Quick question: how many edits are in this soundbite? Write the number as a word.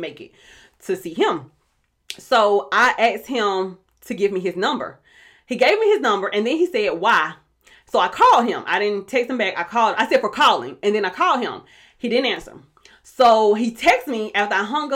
zero